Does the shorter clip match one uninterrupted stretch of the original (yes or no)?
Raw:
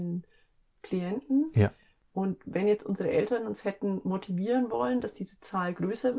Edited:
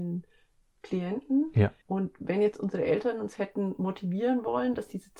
no